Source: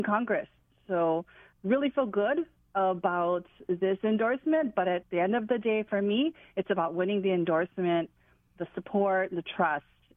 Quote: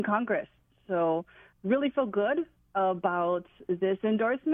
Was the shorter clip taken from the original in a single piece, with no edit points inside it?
yes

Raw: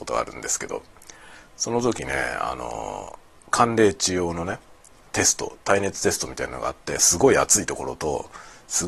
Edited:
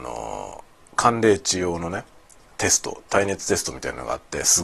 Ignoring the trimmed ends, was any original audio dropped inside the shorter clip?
no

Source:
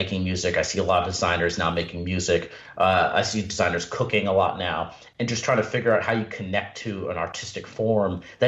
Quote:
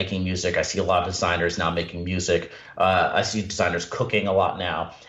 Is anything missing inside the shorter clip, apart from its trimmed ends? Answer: no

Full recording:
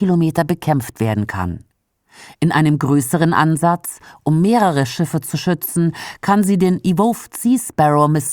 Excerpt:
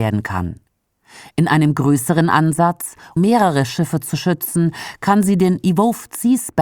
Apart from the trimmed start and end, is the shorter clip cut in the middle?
yes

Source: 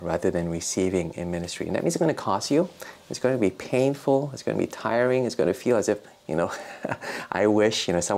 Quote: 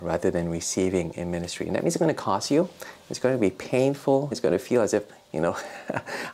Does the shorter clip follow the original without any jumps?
no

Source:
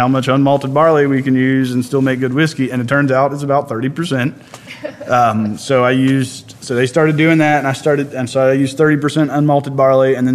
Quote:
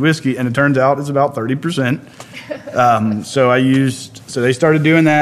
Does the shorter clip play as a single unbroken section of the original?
yes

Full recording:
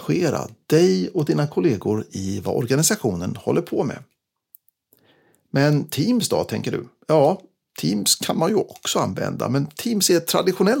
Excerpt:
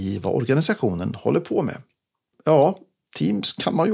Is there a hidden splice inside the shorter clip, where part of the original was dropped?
yes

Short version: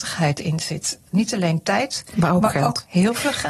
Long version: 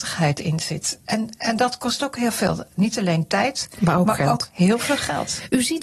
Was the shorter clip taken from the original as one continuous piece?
no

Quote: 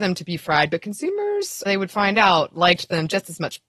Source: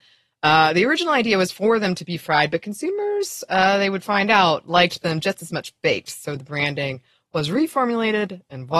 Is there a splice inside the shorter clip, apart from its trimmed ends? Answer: yes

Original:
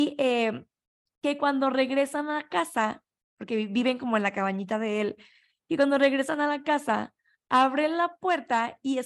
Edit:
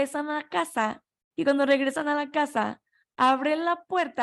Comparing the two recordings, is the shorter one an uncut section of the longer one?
no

